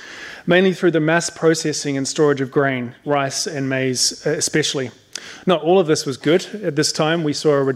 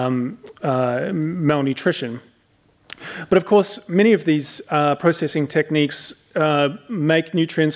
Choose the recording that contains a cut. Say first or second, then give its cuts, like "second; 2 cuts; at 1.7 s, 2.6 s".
first; 1 cut; at 3.0 s